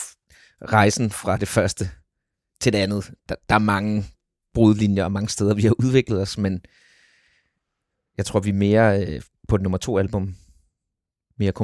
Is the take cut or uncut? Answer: uncut